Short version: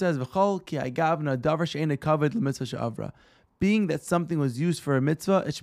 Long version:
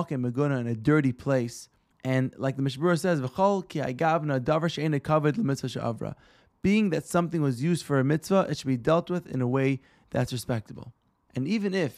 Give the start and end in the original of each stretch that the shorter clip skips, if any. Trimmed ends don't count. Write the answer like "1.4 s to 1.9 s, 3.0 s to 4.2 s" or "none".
none